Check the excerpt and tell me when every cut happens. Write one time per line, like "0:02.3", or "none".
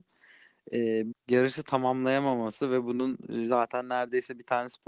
0:01.1

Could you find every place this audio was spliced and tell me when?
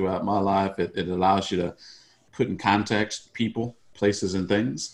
0:03.9

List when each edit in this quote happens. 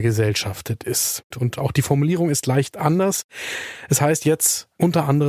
0:01.3

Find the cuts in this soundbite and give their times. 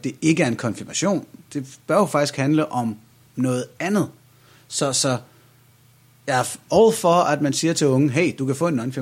none

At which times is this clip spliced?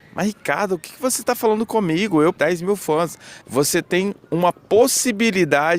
0:02.4
0:03.4

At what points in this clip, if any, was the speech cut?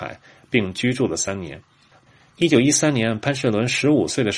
none

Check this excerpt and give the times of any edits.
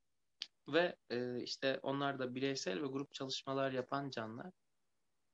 none

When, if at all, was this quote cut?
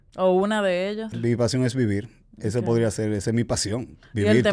0:01.1

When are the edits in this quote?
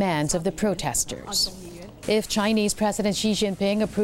0:02.0

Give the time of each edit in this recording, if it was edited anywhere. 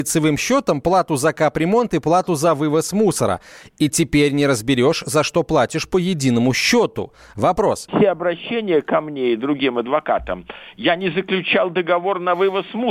0:07.9

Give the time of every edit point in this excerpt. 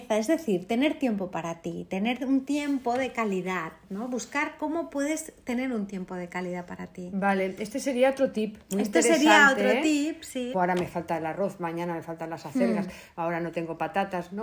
0:10.5

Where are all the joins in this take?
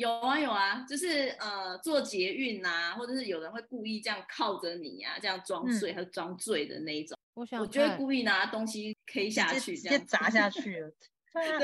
0:07.2
0:09.1

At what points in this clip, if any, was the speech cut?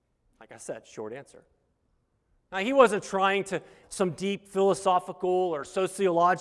0:03.8

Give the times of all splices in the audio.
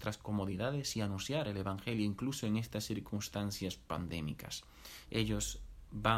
0:05.0

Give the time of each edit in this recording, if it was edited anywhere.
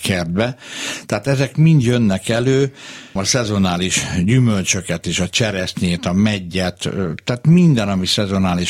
0:03.2

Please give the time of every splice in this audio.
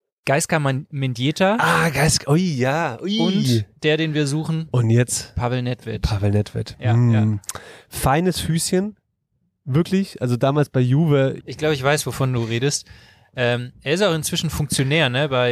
0:11.4

